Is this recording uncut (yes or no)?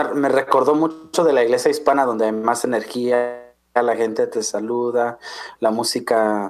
yes